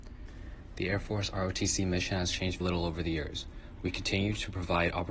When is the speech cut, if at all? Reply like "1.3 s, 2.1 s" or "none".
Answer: 2.6 s, 3.8 s